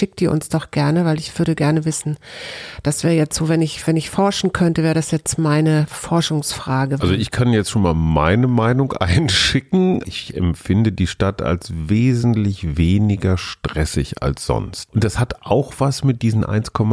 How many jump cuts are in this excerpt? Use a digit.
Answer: 1